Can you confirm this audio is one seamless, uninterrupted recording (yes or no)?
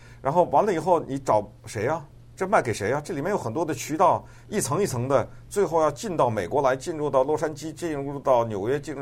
yes